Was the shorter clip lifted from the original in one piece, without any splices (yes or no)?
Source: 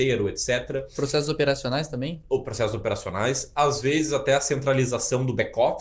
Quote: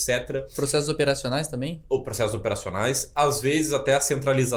yes